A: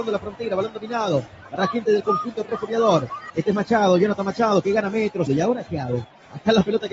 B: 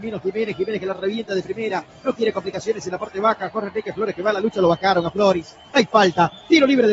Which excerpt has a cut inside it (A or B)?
A